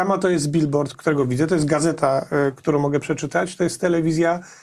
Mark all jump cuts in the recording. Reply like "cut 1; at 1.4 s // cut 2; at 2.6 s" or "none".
cut 1; at 0.9 s

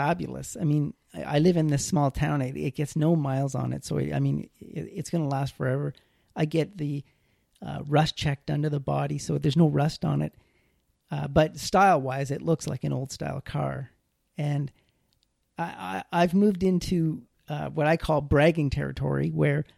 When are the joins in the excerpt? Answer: none

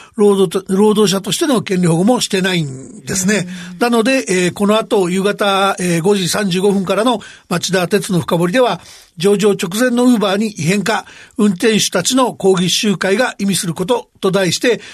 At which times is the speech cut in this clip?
cut 1; at 3.8 s

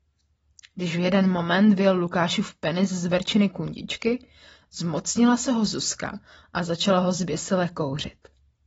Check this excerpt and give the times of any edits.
none

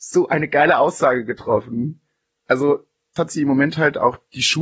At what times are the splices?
cut 1; at 3.2 s

